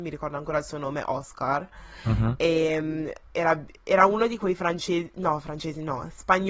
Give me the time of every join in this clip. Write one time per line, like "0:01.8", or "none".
none